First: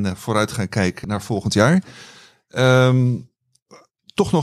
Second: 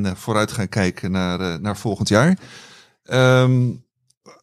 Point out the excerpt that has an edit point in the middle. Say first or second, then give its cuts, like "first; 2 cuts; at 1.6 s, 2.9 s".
first; 1 cut; at 1.0 s